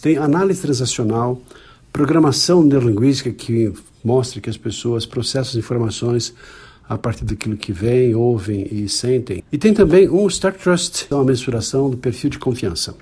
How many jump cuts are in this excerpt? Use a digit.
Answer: 2